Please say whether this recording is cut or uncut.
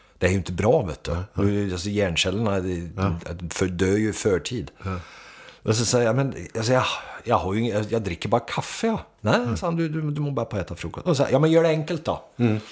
uncut